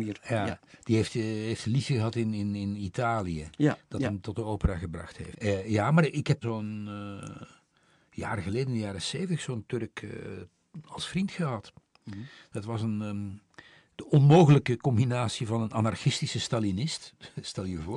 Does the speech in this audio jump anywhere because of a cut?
yes; 2 cuts; at 5.3 s, 6.4 s

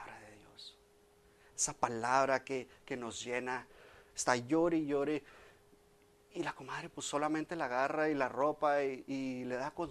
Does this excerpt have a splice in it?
yes; 1 cut; at 4.1 s

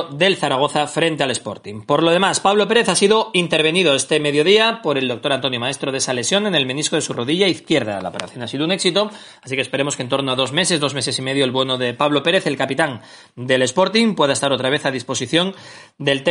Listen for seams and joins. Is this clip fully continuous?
yes; 0 cuts

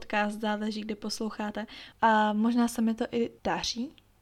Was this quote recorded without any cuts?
no; 1 cut; at 1.9 s

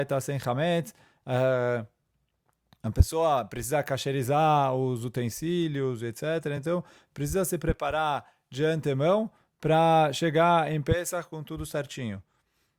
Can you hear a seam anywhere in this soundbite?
no; 0 cuts

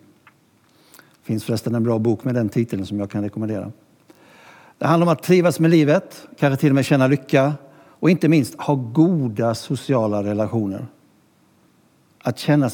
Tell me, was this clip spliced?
no; 0 cuts

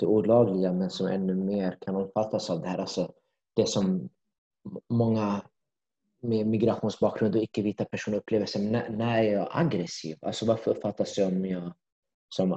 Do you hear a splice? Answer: no; 0 cuts

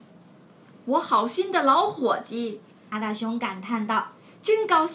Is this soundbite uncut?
no; 1 cut; at 2.9 s

